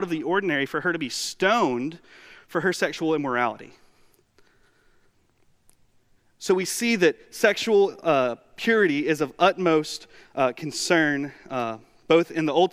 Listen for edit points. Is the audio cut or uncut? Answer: uncut